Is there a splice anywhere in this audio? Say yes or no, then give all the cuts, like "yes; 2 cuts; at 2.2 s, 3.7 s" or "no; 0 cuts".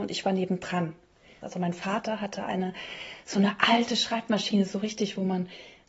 yes; 1 cut; at 1.4 s